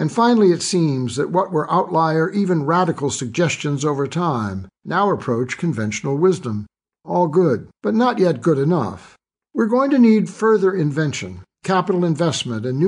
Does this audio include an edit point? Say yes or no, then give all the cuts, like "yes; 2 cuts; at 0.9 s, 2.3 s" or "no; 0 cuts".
no; 0 cuts